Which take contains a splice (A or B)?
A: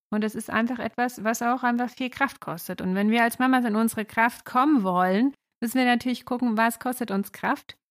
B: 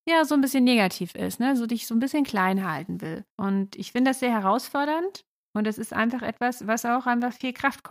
B